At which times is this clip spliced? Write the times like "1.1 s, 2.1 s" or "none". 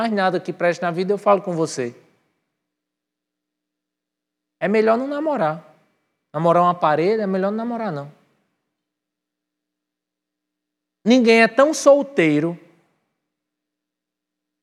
none